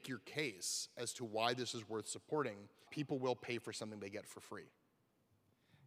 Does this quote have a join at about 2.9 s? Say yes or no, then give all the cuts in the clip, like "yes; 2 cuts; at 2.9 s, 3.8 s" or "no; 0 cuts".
yes; 1 cut; at 2.9 s